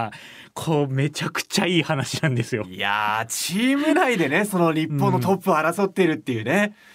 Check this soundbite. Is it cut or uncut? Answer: uncut